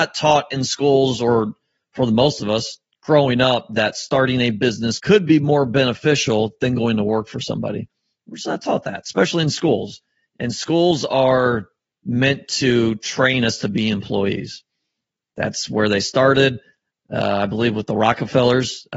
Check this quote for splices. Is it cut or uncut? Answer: cut